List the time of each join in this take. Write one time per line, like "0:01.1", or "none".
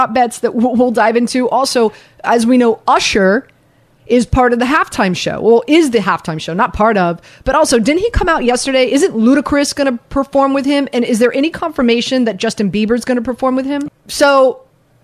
0:13.9